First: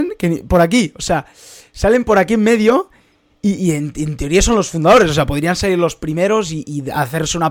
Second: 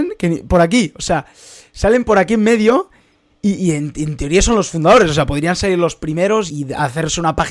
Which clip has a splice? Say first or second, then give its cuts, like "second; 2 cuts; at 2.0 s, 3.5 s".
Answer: second; 1 cut; at 6.5 s